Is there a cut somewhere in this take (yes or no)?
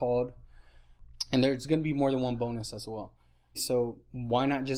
yes